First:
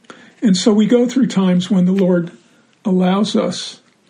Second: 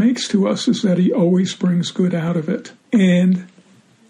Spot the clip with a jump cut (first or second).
second